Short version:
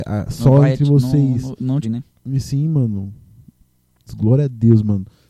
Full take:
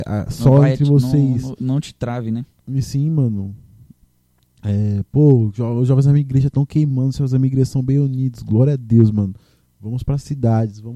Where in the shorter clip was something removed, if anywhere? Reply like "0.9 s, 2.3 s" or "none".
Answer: 1.8 s, 4.1 s